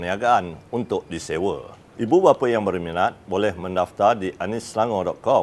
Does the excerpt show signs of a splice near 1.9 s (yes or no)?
yes